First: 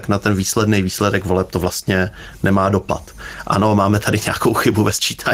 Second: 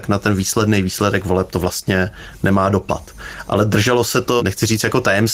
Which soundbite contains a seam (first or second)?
first